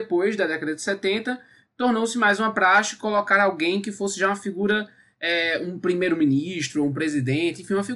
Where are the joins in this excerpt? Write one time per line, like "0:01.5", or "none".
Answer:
none